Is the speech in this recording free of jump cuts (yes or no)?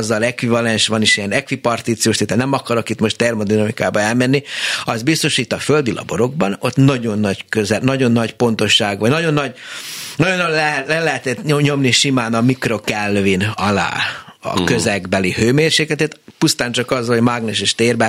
yes